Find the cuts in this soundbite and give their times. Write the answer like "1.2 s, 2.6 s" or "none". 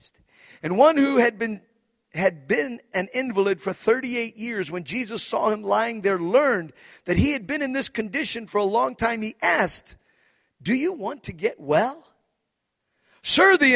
none